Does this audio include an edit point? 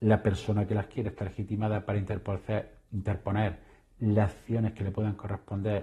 no; 0 cuts

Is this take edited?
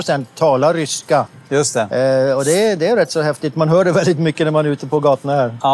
no; 0 cuts

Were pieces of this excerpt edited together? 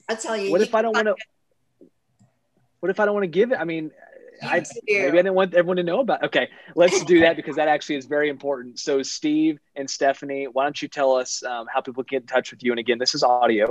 no; 0 cuts

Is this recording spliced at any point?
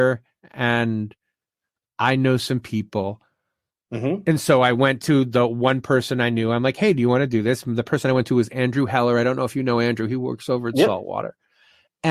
no; 0 cuts

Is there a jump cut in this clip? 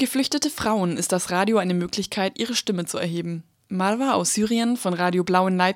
no; 0 cuts

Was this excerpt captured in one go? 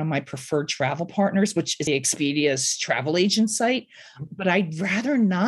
no; 2 cuts; at 1.9 s, 4.3 s

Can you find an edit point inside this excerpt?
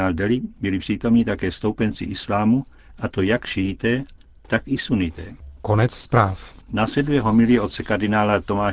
no; 0 cuts

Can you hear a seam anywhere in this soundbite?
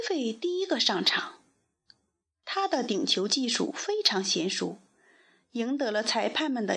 no; 0 cuts

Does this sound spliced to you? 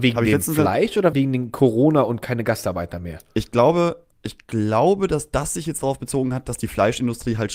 yes; 1 cut; at 1.1 s

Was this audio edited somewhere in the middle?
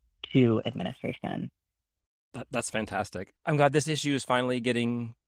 no; 0 cuts

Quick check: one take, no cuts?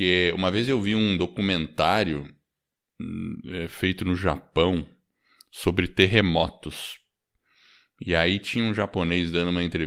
yes; 0 cuts

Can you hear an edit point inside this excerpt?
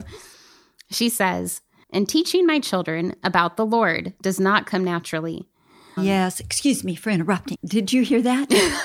yes; 3 cuts; at 1.8 s, 6.0 s, 7.5 s

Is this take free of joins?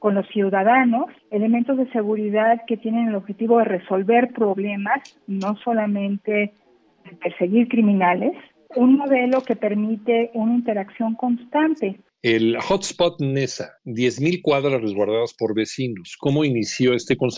no; 2 cuts; at 1.2 s, 8.7 s

